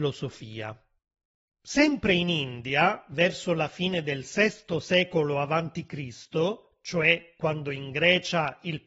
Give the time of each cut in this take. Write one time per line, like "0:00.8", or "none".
none